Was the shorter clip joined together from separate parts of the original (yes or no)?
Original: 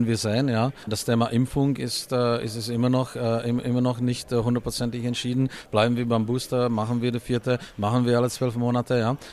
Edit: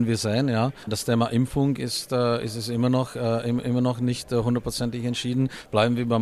no